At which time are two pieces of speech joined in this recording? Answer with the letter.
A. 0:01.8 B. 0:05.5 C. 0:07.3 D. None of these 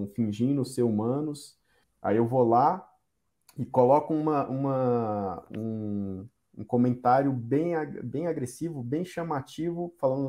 A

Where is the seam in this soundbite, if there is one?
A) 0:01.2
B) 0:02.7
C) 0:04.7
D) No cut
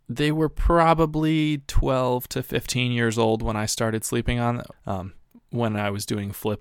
C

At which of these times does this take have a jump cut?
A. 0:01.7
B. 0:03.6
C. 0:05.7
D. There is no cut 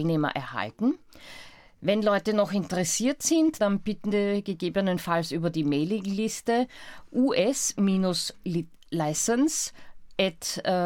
B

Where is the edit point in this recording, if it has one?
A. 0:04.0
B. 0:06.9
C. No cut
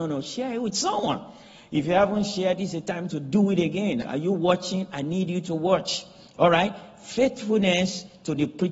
A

